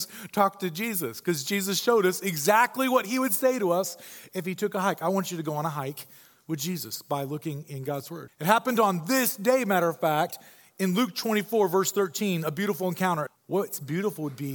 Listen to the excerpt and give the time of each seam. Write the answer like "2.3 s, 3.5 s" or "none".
8.3 s, 13.3 s